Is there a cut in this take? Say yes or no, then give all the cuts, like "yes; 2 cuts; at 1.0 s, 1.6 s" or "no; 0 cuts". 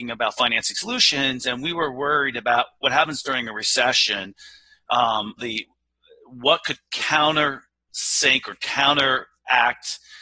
yes; 1 cut; at 5.4 s